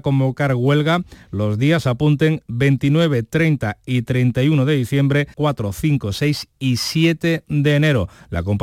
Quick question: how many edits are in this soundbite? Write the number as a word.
one